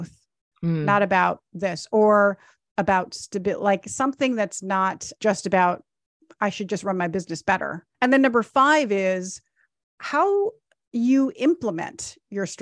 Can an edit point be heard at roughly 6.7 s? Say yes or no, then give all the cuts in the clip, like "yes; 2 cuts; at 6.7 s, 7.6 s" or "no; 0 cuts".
no; 1 cut; at 7.9 s